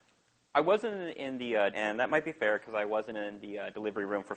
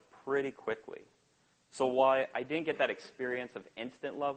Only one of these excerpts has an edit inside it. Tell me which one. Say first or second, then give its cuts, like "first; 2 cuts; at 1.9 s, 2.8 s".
first; 1 cut; at 1.7 s